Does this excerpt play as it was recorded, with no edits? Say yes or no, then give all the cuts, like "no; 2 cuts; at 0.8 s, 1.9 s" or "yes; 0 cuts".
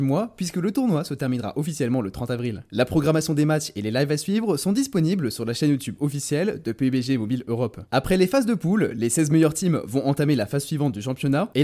yes; 0 cuts